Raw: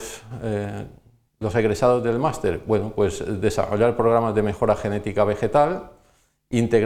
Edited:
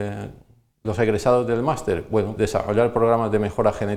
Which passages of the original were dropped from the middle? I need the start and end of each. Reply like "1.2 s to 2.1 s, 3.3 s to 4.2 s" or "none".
2.9 s to 3.4 s